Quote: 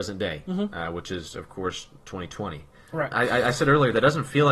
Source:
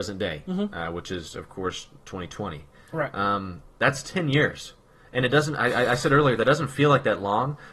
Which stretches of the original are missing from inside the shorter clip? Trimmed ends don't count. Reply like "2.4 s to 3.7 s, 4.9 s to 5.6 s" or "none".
3.1 s to 5.6 s